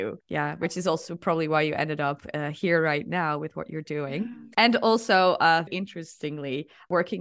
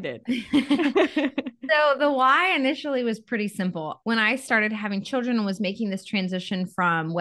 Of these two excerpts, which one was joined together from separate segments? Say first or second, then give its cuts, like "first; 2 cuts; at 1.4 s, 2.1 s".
first; 1 cut; at 5.7 s